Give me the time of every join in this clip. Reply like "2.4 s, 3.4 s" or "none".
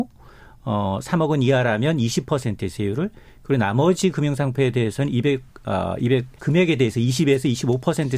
6.4 s